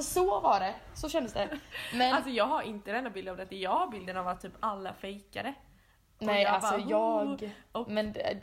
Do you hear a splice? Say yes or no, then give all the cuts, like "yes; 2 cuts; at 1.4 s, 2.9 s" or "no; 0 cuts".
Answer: no; 0 cuts